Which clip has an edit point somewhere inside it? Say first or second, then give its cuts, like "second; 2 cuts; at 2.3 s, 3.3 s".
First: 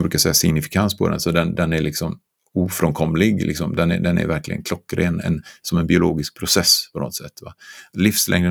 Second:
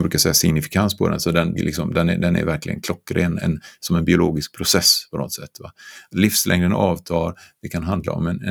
second; 1 cut; at 1.6 s